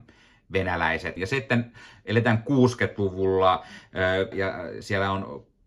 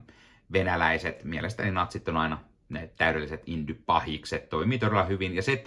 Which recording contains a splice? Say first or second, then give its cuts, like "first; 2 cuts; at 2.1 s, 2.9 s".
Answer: first; 2 cuts; at 1.2 s, 4.3 s